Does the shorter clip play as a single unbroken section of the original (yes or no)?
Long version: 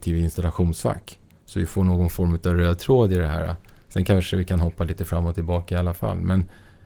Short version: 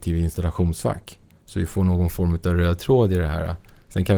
yes